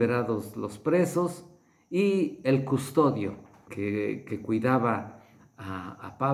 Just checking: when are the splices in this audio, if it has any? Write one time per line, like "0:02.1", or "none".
0:03.7